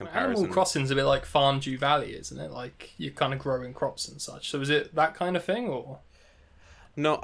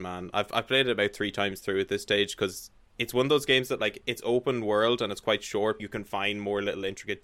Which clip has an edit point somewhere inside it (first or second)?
second